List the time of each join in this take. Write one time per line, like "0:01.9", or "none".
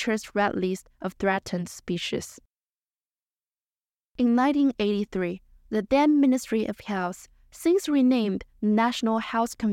0:04.0